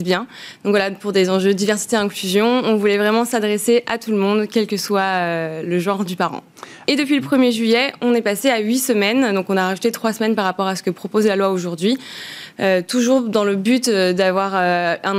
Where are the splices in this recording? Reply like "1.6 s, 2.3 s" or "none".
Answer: 6.8 s